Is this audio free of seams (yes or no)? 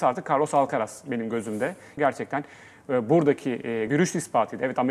no